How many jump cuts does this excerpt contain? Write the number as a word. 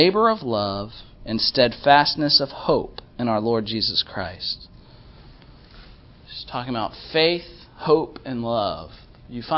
zero